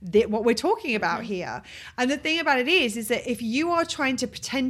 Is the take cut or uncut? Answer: uncut